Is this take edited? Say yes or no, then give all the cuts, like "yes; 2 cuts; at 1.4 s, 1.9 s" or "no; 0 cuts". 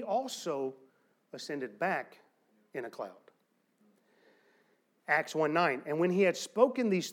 no; 0 cuts